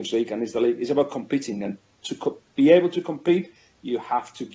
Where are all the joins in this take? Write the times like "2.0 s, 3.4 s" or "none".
none